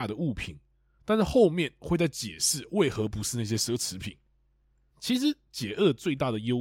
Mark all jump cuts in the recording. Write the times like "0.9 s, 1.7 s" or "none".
1.0 s, 4.9 s